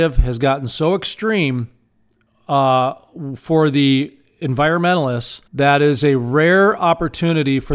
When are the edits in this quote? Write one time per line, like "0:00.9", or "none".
0:05.5